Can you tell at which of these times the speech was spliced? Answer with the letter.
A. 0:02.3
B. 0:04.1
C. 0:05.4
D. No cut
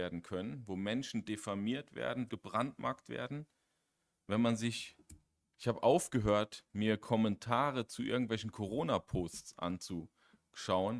A